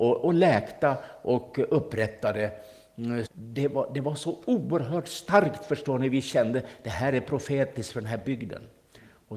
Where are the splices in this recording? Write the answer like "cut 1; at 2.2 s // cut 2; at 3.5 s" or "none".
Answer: cut 1; at 3.3 s